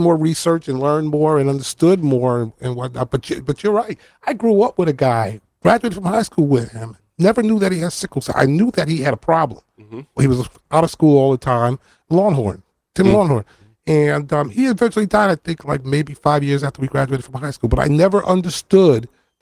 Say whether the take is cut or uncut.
uncut